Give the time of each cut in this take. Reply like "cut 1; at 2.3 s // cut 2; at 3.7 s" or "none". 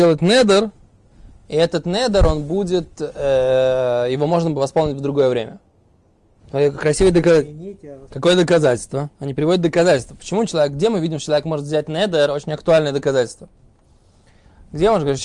cut 1; at 8.1 s